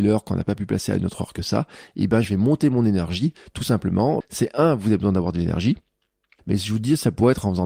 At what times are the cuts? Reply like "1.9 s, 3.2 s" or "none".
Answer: 4.2 s, 6.4 s